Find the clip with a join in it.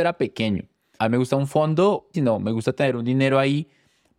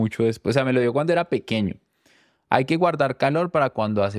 first; 2 cuts; at 1.0 s, 2.1 s

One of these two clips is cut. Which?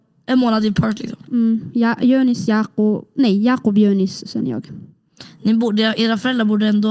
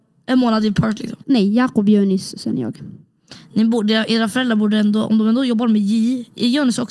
second; 1 cut; at 1.2 s

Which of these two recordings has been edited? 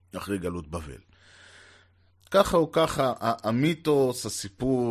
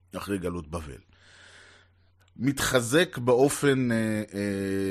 second; 1 cut; at 2.2 s

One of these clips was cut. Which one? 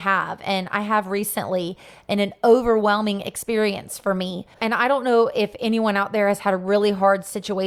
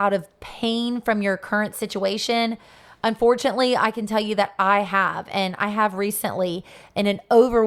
first; 1 cut; at 4.5 s

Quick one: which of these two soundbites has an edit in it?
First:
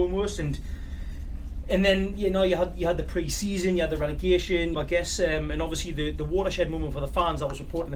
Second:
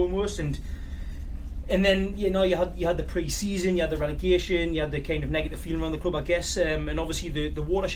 first; 1 cut; at 4.7 s

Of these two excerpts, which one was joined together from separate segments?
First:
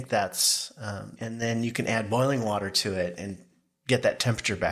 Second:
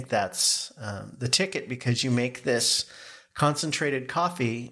first; 1 cut; at 1.2 s

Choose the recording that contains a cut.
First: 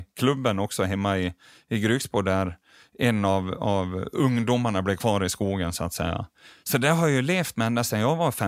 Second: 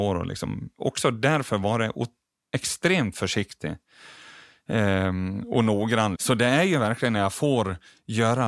second; 1 cut; at 6.1 s

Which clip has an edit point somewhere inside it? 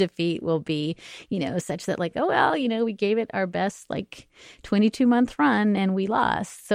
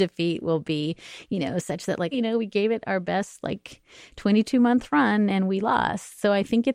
second; 1 cut; at 2.1 s

